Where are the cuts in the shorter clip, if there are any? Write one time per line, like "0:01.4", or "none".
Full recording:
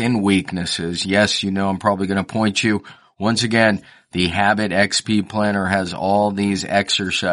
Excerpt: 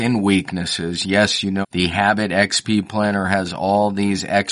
0:01.6